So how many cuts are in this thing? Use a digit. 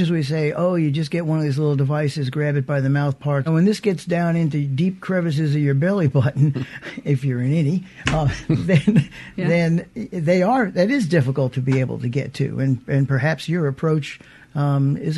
1